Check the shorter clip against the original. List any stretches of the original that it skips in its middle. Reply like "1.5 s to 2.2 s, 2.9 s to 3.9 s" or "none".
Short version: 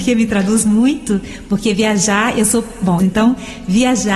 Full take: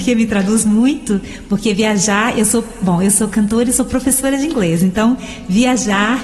3.0 s to 4.8 s